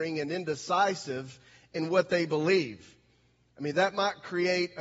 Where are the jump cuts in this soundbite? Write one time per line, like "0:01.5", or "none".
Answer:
none